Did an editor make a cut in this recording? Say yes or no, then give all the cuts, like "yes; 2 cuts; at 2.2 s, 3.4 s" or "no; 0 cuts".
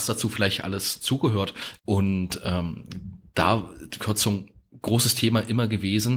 yes; 2 cuts; at 1.8 s, 4.0 s